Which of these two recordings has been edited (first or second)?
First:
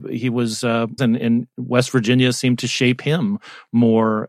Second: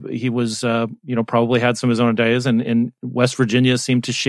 first